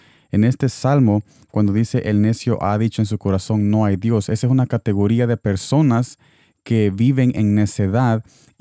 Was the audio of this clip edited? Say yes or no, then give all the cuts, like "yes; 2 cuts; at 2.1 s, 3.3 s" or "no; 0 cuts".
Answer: no; 0 cuts